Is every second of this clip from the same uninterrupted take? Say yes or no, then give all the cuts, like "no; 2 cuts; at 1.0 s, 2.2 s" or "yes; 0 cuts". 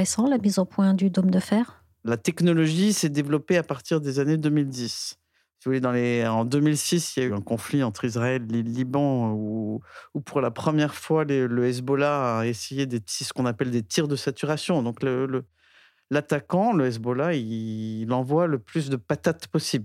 yes; 0 cuts